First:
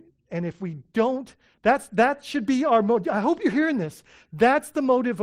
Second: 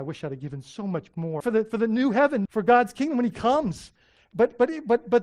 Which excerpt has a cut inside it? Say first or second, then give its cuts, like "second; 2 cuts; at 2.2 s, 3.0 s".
second; 2 cuts; at 1.4 s, 2.4 s